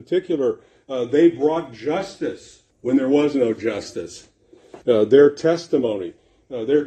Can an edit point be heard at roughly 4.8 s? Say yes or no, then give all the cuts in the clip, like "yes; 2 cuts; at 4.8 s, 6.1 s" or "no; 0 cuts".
yes; 2 cuts; at 2.7 s, 4.8 s